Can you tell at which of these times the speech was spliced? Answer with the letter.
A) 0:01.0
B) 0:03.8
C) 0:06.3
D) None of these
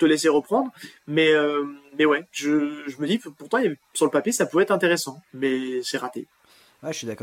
D